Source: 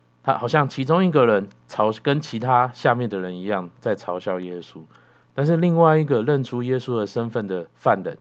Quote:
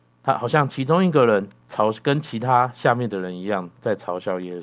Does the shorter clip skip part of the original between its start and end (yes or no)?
no